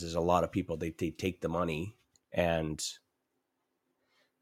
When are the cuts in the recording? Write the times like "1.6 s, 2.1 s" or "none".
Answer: 2.1 s